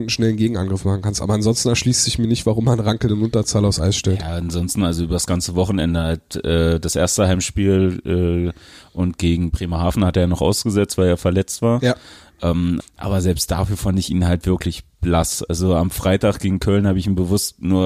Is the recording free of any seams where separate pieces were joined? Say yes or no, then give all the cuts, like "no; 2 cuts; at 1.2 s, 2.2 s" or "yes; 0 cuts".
no; 1 cut; at 12.8 s